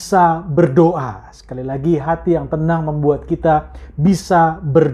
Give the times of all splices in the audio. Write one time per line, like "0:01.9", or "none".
none